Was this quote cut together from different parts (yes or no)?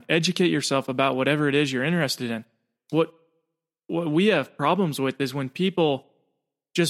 yes